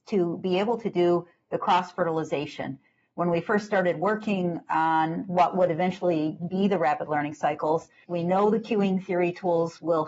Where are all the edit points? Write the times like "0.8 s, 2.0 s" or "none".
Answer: 8.0 s